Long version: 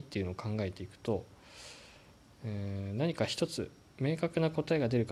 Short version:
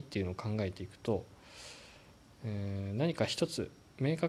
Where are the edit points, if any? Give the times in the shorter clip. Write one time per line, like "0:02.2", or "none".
none